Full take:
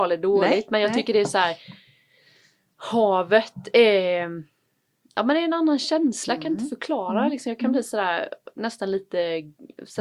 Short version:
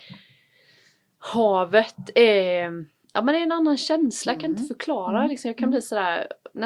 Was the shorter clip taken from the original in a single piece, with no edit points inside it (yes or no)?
no